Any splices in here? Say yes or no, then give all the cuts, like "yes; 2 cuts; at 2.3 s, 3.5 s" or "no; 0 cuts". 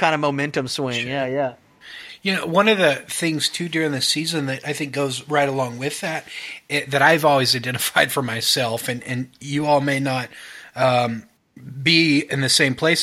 no; 0 cuts